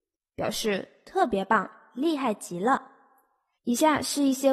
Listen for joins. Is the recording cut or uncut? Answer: cut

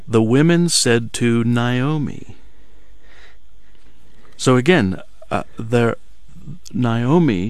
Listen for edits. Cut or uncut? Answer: uncut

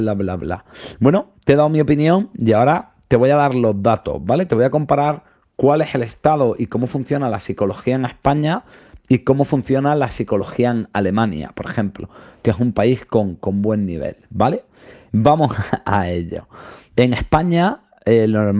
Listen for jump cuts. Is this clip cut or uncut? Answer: uncut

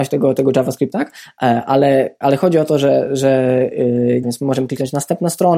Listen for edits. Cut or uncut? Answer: cut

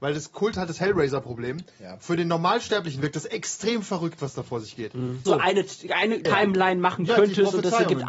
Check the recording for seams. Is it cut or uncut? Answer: cut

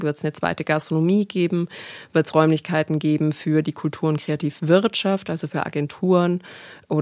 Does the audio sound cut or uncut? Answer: uncut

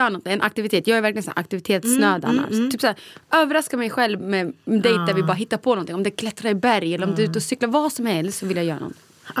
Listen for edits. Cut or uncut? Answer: uncut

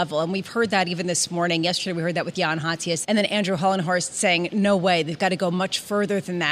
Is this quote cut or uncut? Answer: cut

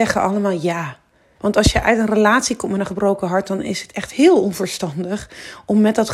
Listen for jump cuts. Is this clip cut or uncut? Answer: cut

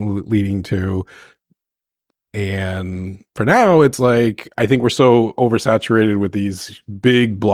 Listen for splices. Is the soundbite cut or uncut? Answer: uncut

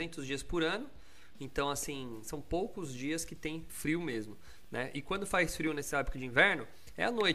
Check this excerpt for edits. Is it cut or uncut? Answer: cut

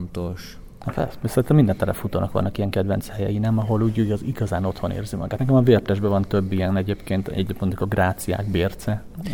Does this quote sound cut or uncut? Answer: uncut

